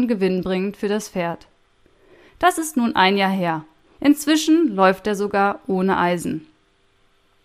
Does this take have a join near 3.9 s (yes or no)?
yes